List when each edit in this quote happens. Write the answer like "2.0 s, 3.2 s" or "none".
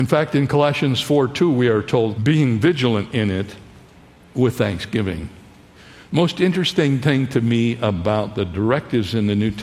2.2 s